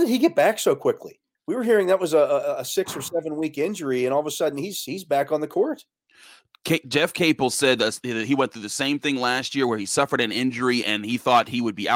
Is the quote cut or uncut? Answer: uncut